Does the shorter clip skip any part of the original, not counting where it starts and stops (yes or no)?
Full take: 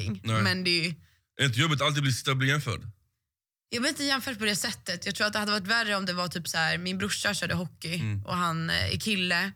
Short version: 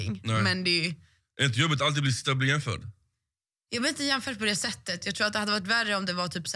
no